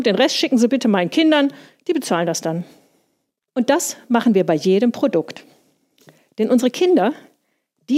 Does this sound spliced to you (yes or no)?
no